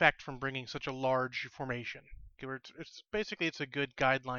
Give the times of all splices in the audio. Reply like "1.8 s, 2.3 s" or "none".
2.4 s

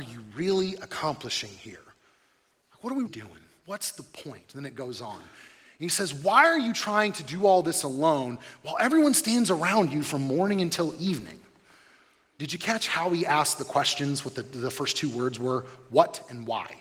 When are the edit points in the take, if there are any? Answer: 3.1 s

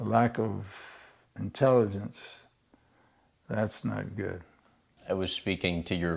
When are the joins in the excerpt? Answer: 5.0 s

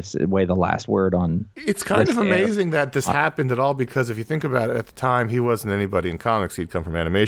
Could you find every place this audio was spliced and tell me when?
1.5 s

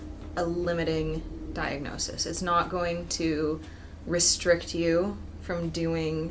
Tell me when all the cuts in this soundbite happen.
none

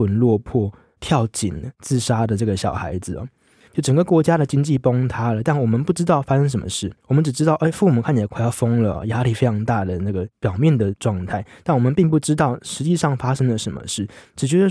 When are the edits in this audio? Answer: 3.7 s, 7.0 s

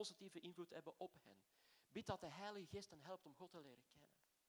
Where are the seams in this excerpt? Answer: none

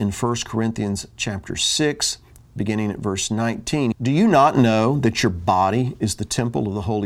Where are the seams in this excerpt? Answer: 3.9 s

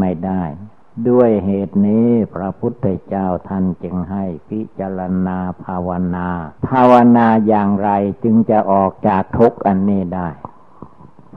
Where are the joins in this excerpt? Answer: 6.6 s

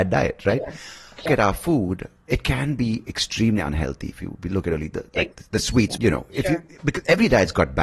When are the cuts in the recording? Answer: 1.3 s, 6.0 s

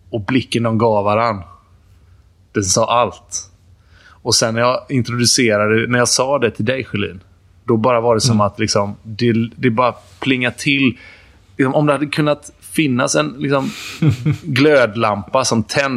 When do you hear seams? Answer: none

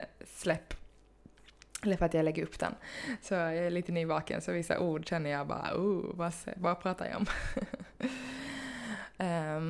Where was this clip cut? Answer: none

